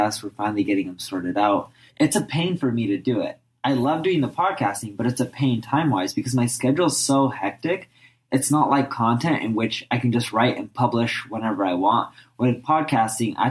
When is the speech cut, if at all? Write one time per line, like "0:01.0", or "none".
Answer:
none